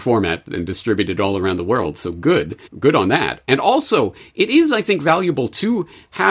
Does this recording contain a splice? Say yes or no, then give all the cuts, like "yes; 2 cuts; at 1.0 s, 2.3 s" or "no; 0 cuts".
yes; 1 cut; at 2.7 s